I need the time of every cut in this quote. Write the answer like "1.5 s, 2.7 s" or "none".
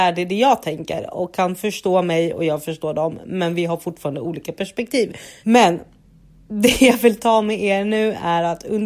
5.4 s